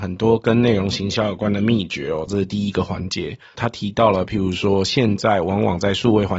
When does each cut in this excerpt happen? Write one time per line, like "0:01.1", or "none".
0:02.3
0:03.5